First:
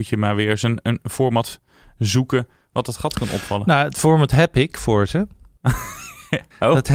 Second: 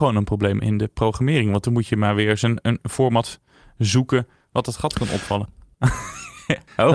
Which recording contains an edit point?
second; 1 cut; at 5.4 s

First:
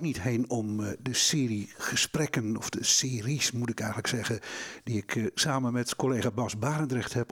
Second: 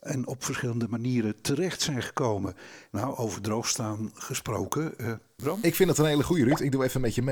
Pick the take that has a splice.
second; 2 cuts; at 2.9 s, 5.4 s

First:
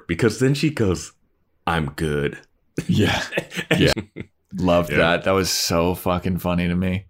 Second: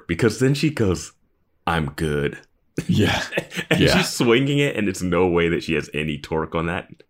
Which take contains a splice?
first; 1 cut; at 3.9 s

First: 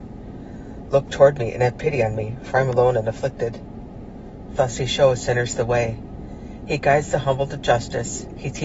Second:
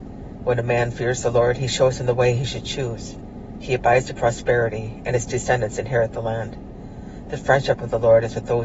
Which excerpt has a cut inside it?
first; 1 cut; at 4.5 s

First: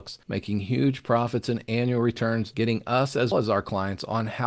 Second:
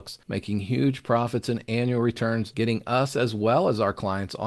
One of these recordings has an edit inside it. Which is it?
first; 1 cut; at 3.3 s

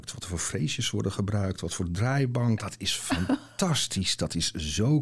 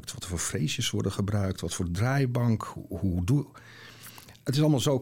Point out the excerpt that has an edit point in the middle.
first; 1 cut; at 2.6 s

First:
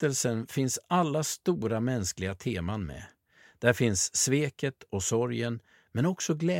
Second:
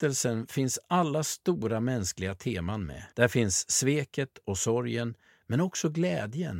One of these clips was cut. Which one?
second; 1 cut; at 3.1 s

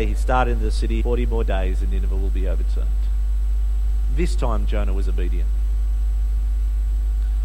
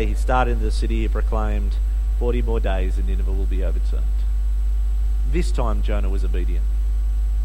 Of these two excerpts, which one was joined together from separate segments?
first; 1 cut; at 1.0 s

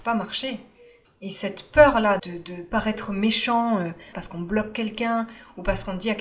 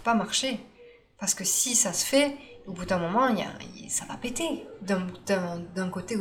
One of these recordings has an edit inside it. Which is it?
first; 3 cuts; at 1.0 s, 2.2 s, 4.1 s

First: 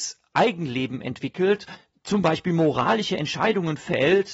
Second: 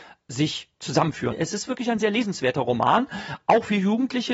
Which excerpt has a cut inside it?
second; 1 cut; at 1.3 s

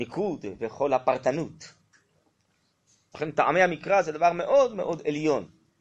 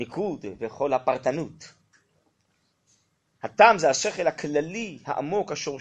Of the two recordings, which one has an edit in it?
first; 1 cut; at 3.1 s

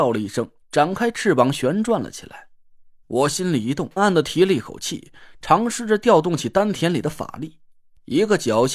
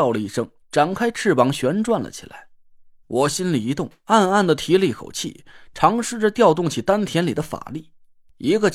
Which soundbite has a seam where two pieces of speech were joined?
first; 1 cut; at 4.0 s

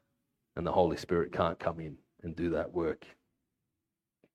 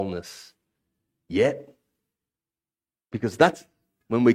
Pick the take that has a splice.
second; 1 cut; at 3.0 s

